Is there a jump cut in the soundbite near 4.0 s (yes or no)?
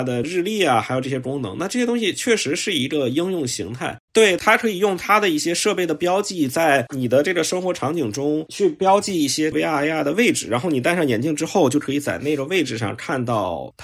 yes